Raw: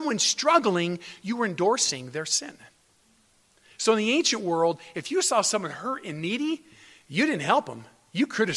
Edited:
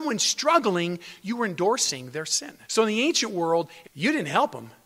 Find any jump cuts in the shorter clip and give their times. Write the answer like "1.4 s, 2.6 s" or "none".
2.6 s, 3.8 s